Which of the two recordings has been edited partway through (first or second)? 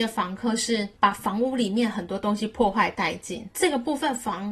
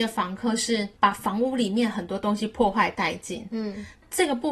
first